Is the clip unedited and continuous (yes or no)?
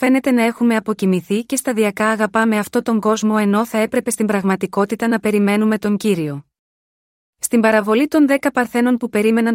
yes